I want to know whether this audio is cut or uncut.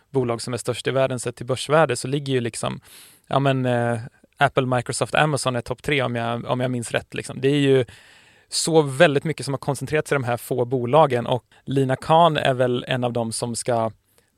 cut